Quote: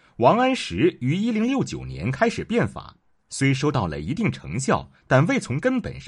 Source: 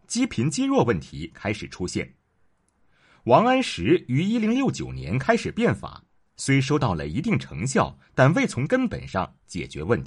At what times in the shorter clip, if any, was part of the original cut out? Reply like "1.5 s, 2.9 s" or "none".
none